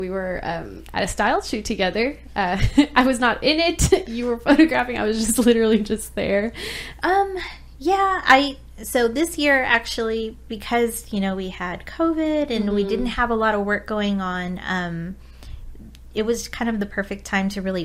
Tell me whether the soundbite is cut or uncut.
cut